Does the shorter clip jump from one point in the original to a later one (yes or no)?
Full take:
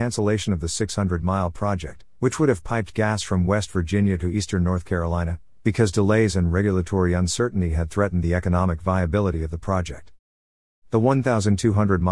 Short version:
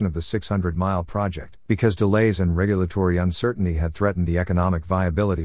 yes